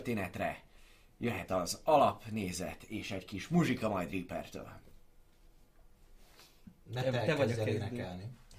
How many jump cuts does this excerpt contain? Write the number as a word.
zero